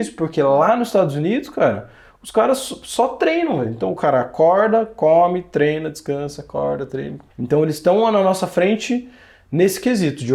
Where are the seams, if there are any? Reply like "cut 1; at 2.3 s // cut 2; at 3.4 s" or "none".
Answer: cut 1; at 7.3 s